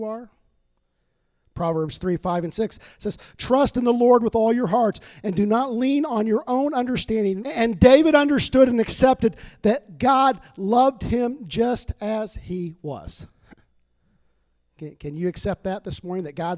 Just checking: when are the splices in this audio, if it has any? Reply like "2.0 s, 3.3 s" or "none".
7.4 s